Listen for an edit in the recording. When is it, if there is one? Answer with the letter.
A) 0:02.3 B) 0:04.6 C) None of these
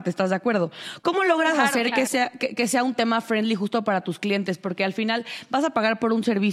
C